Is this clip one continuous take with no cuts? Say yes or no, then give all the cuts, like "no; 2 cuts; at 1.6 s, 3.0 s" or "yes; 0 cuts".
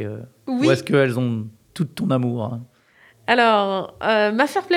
yes; 0 cuts